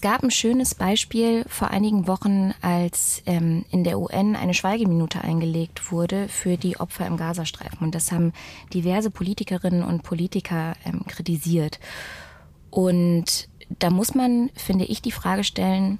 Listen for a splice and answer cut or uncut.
uncut